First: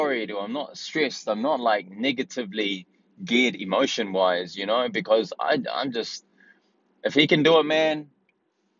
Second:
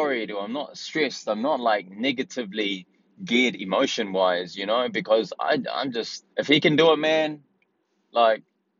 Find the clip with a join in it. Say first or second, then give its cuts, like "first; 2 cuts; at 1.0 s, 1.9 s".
second; 1 cut; at 6.3 s